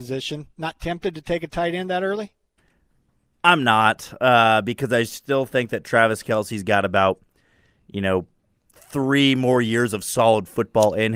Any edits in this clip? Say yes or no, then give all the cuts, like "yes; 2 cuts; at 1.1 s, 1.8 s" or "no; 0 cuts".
no; 0 cuts